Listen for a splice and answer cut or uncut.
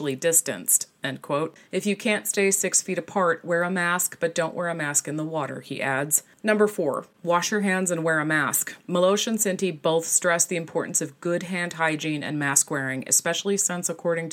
uncut